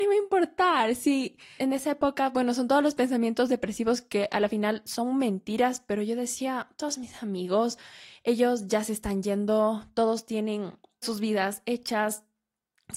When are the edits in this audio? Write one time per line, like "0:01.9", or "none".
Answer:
0:01.6
0:11.0